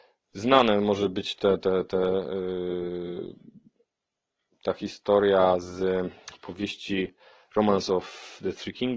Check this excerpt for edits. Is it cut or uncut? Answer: uncut